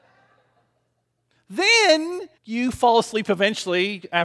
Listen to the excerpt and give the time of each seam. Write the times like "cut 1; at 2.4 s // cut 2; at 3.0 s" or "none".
cut 1; at 2.4 s